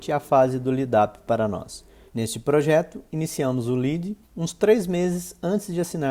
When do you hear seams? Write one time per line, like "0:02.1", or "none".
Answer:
0:02.1
0:04.2